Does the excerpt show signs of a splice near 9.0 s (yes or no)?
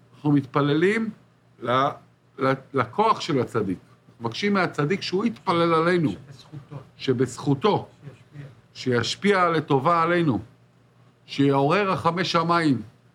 no